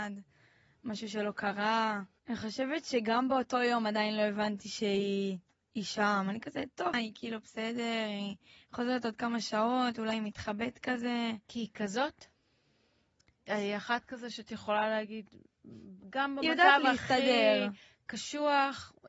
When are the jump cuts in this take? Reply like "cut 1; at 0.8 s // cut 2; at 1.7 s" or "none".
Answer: cut 1; at 6.9 s // cut 2; at 13.5 s